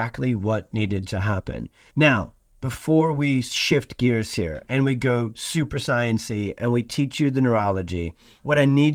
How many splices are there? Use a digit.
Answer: 1